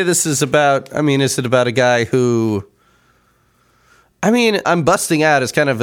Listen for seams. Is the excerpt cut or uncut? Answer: cut